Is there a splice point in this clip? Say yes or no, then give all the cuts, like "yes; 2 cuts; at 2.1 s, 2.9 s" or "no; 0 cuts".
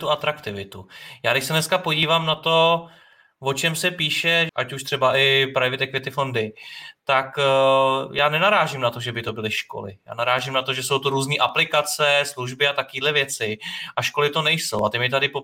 yes; 1 cut; at 4.5 s